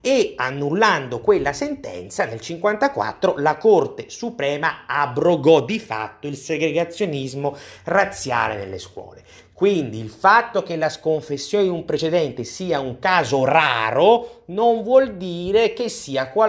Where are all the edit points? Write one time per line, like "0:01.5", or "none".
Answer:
none